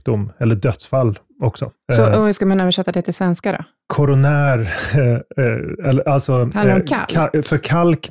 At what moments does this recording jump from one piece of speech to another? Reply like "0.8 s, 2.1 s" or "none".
none